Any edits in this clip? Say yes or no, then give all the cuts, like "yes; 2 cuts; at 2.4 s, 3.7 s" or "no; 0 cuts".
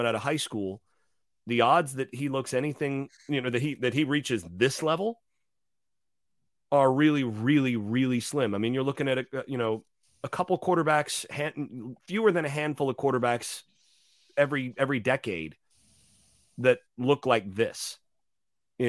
no; 0 cuts